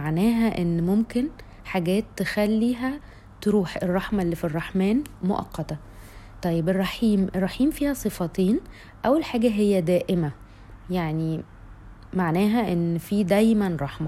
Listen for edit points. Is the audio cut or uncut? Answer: uncut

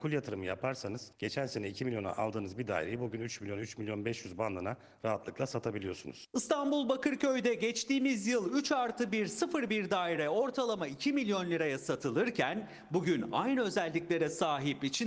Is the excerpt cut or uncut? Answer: uncut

